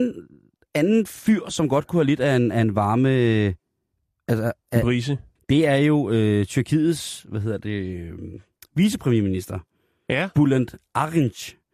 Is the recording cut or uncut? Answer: cut